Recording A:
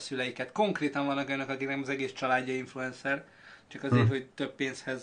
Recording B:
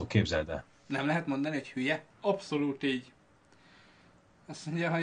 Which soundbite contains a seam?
B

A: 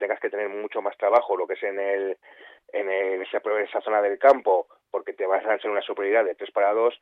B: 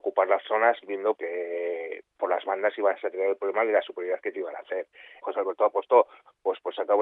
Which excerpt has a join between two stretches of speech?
B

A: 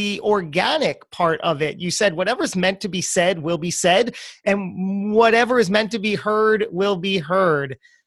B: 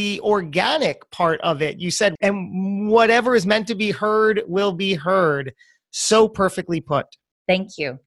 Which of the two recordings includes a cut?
B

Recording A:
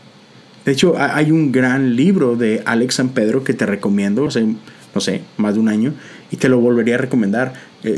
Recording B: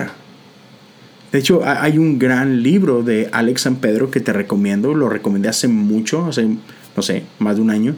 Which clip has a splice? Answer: A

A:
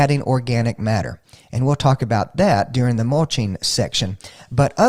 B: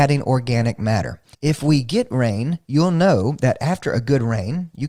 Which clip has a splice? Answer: B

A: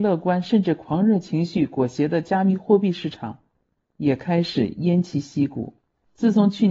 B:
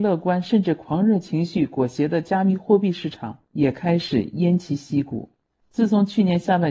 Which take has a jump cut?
B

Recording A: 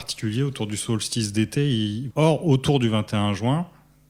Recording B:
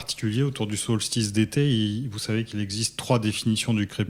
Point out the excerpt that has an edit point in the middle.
A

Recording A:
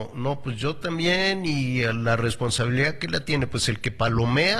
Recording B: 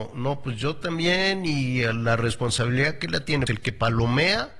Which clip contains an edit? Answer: B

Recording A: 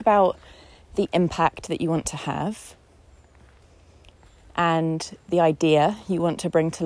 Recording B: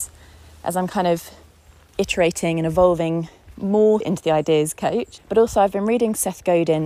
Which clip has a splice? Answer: B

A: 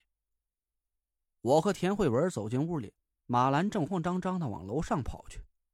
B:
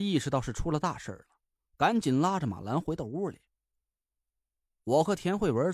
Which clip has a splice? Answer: A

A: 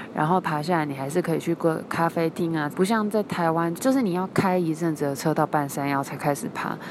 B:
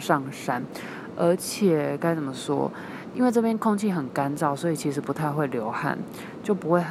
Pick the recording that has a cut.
A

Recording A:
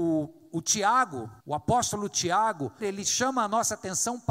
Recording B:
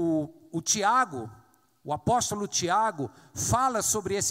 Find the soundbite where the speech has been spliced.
A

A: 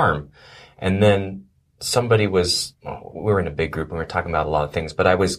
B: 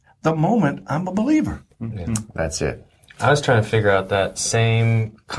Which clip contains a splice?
A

